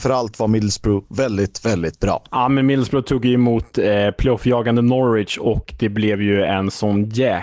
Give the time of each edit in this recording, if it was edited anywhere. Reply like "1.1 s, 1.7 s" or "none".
none